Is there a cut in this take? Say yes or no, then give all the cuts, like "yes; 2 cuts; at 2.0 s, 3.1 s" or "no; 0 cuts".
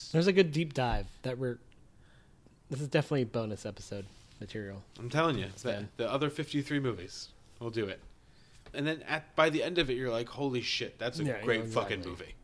yes; 1 cut; at 8.7 s